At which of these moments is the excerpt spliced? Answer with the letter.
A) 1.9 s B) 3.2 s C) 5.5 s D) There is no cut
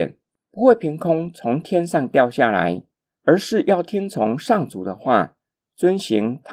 D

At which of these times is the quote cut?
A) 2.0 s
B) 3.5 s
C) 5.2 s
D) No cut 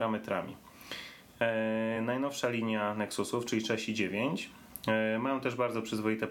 D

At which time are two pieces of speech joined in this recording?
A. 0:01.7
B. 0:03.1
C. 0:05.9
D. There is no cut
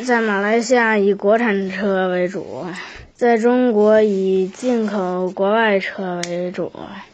B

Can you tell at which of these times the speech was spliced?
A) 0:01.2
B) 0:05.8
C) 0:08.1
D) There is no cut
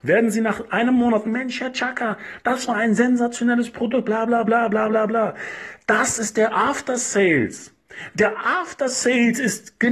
A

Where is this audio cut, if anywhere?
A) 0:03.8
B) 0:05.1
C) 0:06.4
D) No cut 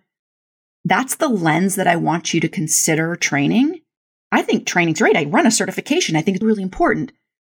C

